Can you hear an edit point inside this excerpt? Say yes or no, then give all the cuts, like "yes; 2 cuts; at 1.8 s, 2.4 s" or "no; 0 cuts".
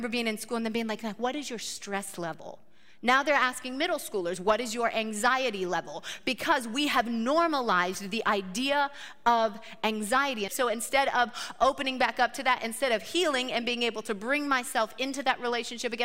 yes; 1 cut; at 10.5 s